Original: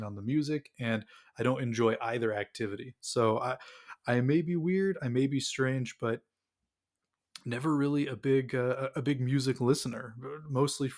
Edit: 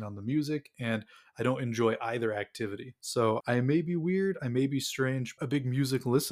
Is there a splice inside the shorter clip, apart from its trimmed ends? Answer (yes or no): yes